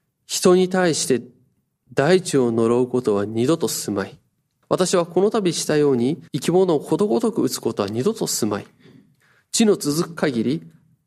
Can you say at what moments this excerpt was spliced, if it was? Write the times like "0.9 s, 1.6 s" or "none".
4.6 s, 6.3 s